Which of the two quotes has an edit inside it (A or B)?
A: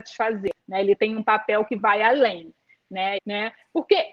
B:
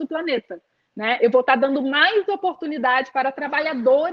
A